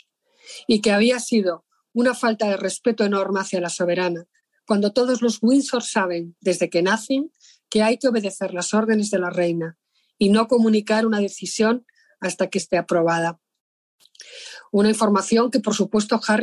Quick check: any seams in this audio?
no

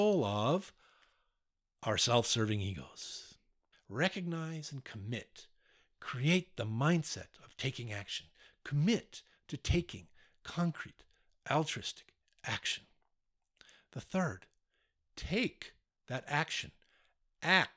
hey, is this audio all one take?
no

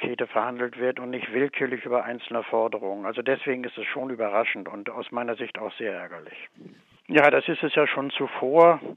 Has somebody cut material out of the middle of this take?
yes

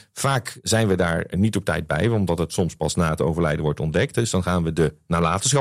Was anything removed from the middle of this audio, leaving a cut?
no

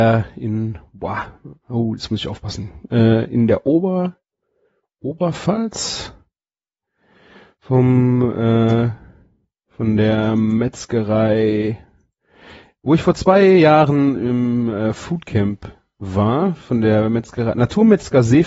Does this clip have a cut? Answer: no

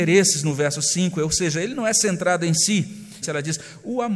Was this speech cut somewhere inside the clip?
yes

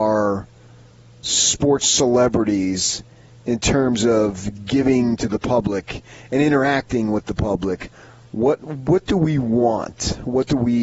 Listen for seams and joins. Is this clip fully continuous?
yes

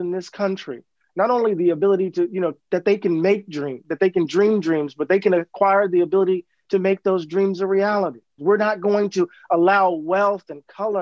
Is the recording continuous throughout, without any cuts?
no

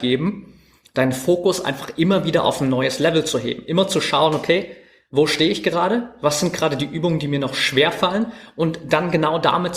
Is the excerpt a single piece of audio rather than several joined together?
yes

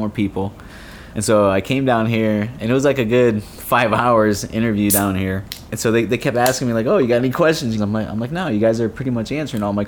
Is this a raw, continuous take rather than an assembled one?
no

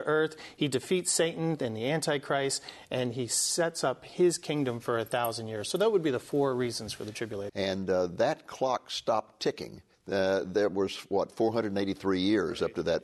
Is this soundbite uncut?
no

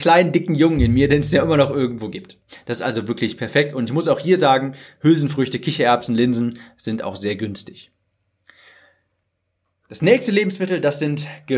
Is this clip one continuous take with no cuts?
yes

